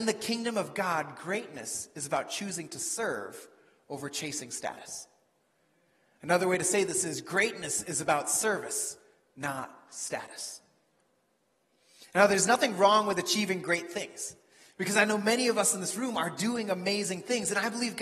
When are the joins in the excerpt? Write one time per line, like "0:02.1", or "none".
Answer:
none